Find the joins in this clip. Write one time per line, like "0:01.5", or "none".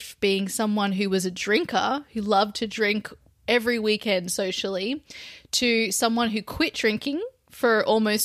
none

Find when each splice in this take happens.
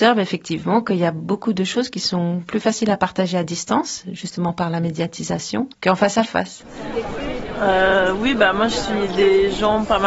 0:05.7

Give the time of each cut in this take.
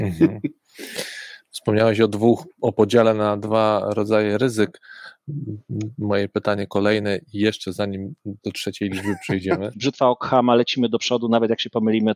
0:09.7

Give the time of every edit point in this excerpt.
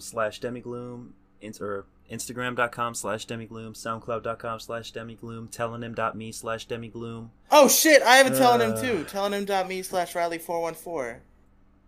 none

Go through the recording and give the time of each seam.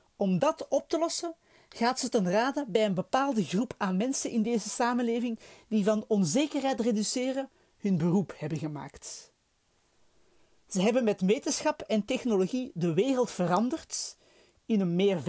none

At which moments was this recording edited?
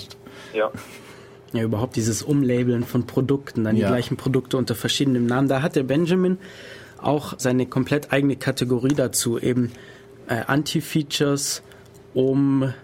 0:07.4

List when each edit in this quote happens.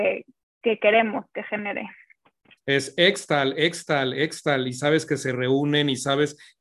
0:02.6

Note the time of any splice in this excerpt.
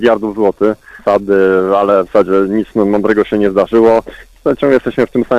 0:01.0

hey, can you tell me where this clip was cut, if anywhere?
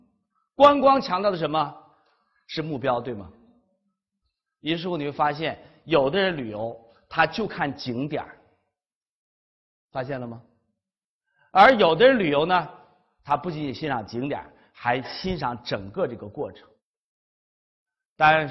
none

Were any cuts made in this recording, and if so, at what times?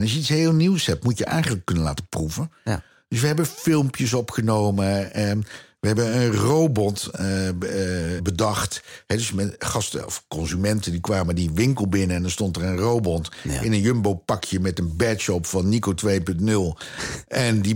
0:08.2

